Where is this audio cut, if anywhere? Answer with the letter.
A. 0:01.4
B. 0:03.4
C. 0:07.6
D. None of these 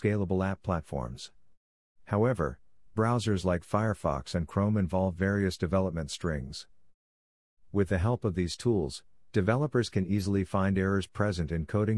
C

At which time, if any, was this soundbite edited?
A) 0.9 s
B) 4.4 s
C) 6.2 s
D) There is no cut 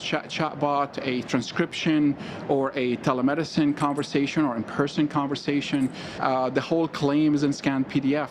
C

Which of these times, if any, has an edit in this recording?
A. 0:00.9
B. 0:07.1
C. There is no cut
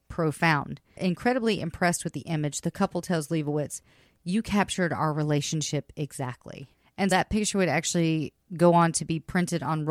B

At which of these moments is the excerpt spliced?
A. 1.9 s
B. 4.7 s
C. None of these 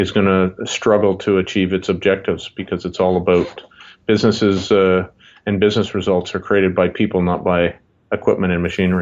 C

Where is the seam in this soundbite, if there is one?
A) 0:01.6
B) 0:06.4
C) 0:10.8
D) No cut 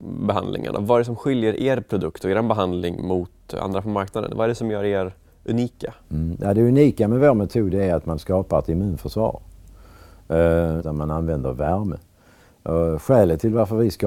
C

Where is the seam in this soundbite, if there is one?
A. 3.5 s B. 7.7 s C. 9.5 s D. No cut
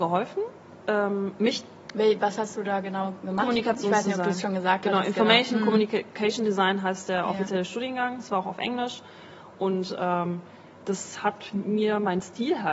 D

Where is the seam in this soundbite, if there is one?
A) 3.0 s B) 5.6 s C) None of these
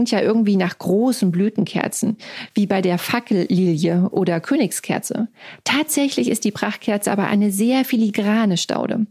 C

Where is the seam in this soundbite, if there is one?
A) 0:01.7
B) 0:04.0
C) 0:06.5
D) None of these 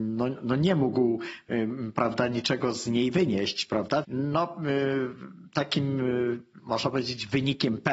B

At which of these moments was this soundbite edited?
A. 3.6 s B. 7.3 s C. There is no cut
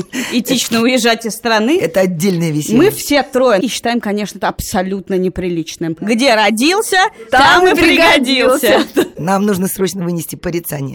A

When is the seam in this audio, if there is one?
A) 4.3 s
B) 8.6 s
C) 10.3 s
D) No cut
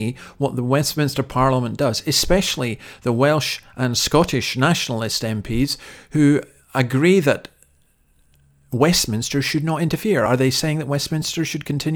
D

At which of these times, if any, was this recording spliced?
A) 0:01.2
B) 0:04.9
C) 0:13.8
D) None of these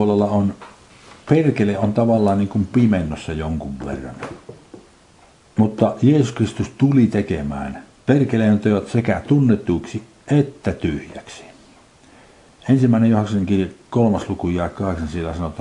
D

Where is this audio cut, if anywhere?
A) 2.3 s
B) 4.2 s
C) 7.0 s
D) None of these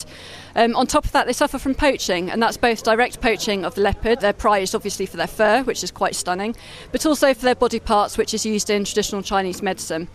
B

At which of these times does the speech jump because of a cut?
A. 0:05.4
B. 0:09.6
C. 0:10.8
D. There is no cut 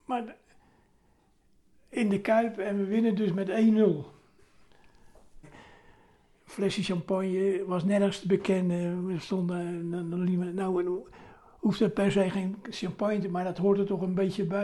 A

